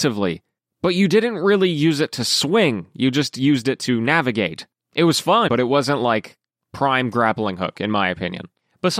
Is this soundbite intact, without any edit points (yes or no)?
no